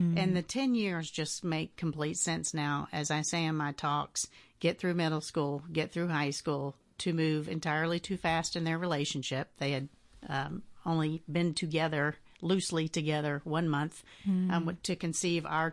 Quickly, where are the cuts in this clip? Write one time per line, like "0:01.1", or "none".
0:04.4